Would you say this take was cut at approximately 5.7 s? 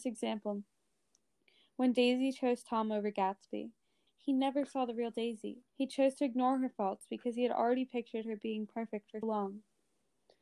yes; 3 cuts; at 4.1 s, 5.7 s, 9.2 s

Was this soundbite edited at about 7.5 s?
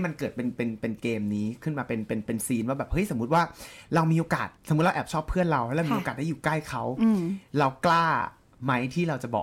yes; 2 cuts; at 4.6 s, 7.5 s

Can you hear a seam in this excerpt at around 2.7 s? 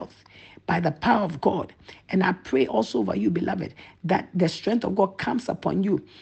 no; 0 cuts

